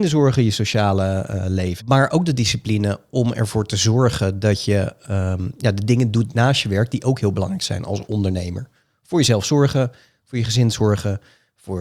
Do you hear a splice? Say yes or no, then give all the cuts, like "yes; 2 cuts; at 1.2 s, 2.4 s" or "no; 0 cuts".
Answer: yes; 1 cut; at 1.8 s